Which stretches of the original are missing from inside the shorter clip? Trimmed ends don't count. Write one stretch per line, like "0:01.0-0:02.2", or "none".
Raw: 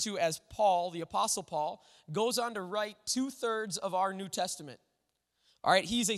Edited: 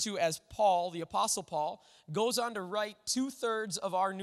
none